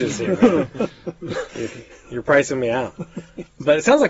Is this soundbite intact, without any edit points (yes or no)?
yes